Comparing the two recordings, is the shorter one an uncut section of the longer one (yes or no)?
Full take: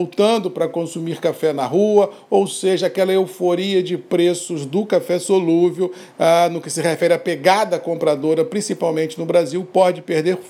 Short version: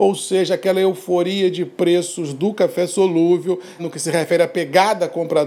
no